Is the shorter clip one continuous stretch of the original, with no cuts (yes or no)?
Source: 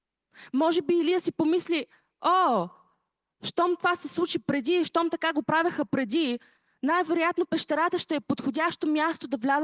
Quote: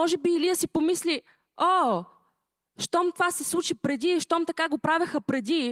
yes